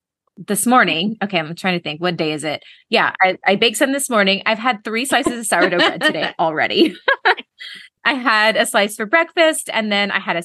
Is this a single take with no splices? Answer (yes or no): yes